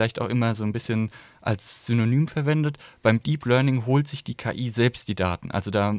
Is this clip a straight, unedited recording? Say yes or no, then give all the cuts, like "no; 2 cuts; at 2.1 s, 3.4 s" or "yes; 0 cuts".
yes; 0 cuts